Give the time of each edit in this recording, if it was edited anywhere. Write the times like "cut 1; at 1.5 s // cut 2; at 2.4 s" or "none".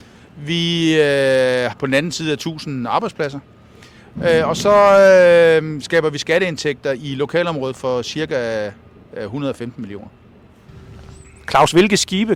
cut 1; at 1.7 s